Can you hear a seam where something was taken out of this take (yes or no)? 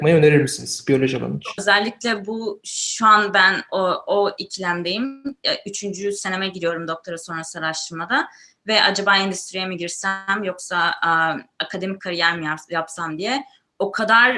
yes